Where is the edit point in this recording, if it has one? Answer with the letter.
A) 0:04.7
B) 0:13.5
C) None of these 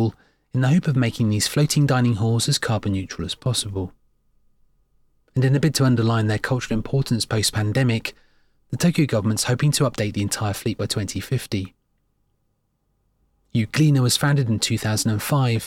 C